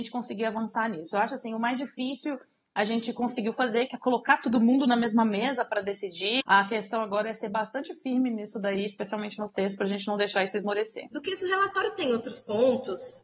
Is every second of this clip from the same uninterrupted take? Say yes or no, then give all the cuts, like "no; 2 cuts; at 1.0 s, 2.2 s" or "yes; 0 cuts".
no; 1 cut; at 6.4 s